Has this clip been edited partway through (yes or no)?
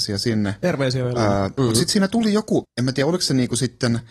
yes